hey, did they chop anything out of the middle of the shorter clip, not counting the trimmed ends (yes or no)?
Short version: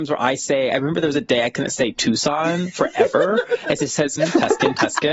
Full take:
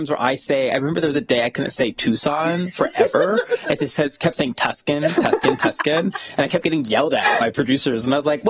yes